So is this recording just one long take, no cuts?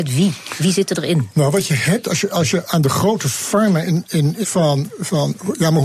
no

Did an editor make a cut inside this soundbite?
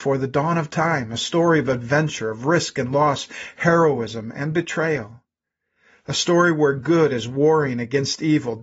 no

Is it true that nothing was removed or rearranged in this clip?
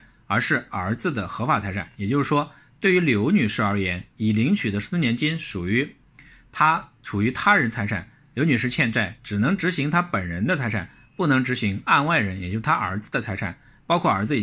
yes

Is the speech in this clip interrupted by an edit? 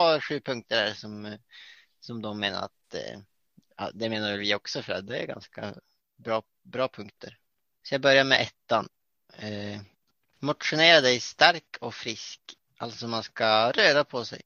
no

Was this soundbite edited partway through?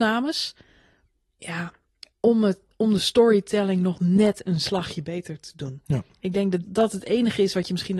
yes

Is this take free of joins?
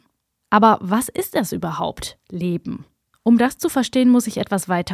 yes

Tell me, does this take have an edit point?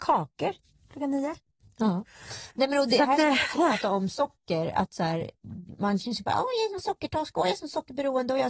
no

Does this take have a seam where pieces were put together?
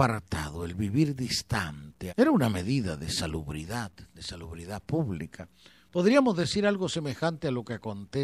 yes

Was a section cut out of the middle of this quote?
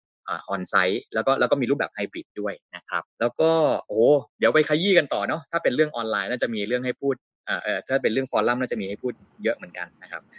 yes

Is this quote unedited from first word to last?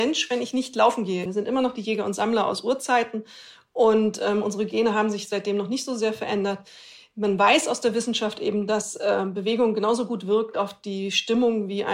no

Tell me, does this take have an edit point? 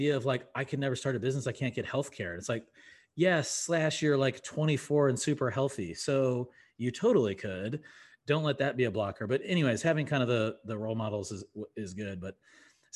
no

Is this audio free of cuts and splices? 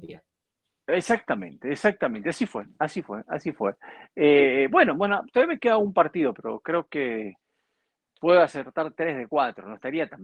yes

